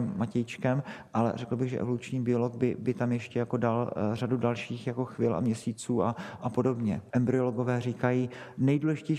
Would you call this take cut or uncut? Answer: cut